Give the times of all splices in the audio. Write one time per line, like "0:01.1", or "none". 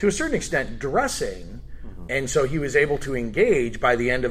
0:02.1